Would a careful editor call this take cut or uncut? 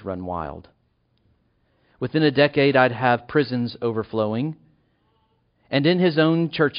uncut